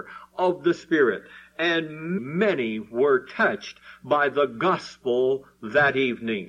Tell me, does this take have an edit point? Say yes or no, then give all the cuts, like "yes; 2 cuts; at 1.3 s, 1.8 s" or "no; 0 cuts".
yes; 1 cut; at 2.2 s